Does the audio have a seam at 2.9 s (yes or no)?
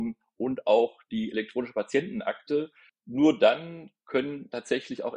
yes